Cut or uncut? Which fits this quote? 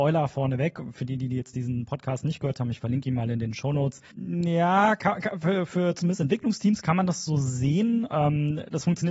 cut